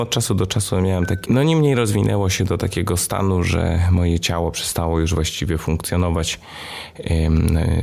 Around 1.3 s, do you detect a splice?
yes; 1 cut; at 1.3 s

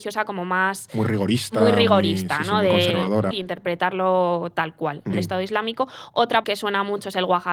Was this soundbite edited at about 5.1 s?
yes; 3 cuts; at 3.3 s, 5.1 s, 6.4 s

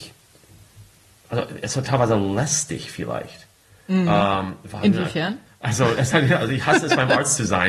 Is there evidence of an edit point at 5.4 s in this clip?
yes; 1 cut; at 5.4 s

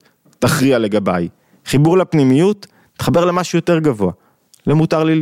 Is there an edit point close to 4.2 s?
no; 0 cuts

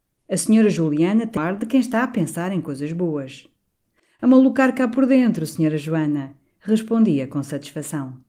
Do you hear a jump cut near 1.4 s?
yes; 1 cut; at 1.4 s

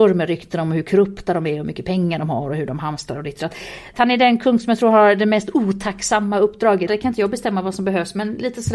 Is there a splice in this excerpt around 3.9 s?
yes; 2 cuts; at 3.9 s, 6.9 s

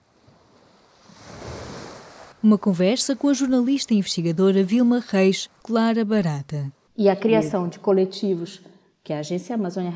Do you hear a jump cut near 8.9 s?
no; 3 cuts; at 2.3 s, 5.6 s, 6.9 s

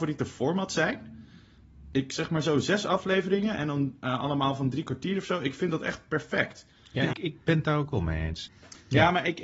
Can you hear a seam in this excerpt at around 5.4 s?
no; 2 cuts; at 7.1 s, 8.5 s

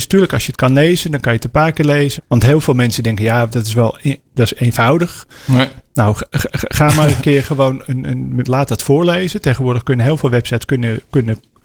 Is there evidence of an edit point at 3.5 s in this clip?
yes; 3 cuts; at 2.2 s, 3.5 s, 8.4 s

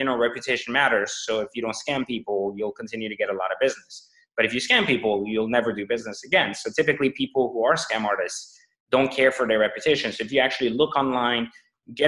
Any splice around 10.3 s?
no; 0 cuts

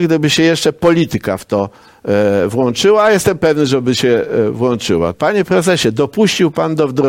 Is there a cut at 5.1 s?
yes; 1 cut; at 5.1 s

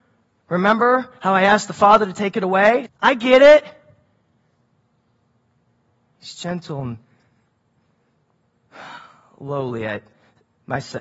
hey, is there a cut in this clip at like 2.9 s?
yes; 1 cut; at 2.9 s

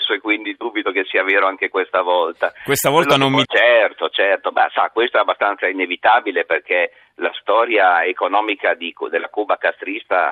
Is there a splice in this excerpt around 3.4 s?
yes; 1 cut; at 3.4 s

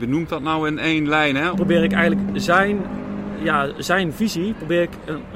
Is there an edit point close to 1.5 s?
yes; 1 cut; at 1.5 s

